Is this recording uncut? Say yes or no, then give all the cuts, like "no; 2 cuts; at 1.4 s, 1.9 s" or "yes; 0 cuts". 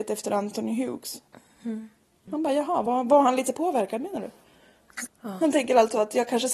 no; 2 cuts; at 2.3 s, 5.1 s